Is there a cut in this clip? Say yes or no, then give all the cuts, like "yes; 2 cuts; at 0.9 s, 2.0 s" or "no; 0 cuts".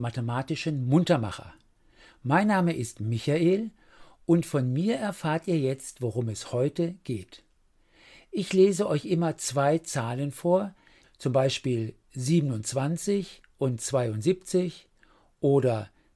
yes; 1 cut; at 11.0 s